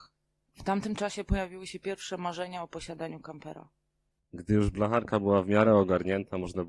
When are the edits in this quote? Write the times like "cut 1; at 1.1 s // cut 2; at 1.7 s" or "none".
cut 1; at 4.2 s